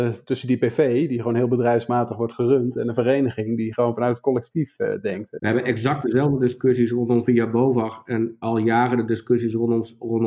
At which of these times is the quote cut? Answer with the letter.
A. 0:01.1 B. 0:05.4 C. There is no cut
B